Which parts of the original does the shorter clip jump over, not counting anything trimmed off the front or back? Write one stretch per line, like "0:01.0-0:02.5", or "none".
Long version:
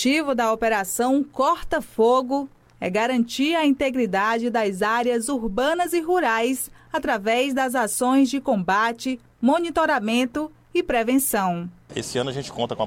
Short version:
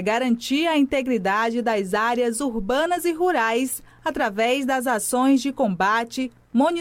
none